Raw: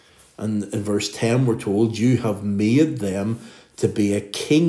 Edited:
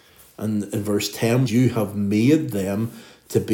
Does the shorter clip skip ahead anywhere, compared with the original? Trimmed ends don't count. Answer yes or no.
yes